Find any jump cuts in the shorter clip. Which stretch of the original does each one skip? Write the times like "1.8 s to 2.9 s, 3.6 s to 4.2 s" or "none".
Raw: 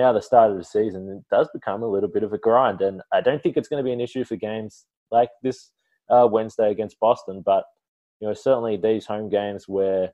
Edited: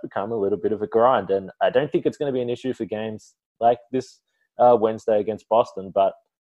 none